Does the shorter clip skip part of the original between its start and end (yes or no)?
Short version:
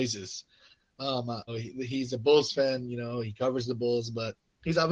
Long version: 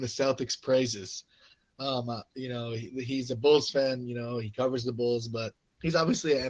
yes